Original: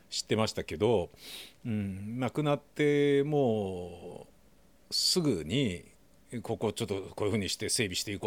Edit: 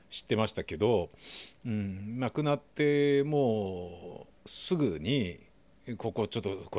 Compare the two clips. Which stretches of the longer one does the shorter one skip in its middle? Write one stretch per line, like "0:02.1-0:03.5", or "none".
0:04.4-0:04.8